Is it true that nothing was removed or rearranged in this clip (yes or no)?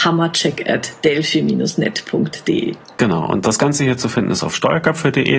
yes